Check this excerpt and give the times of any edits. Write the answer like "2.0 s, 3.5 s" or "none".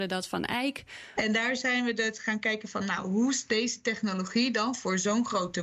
1.1 s